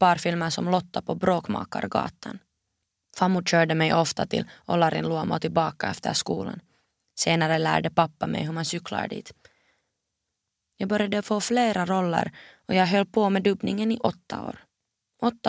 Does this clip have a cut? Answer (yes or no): no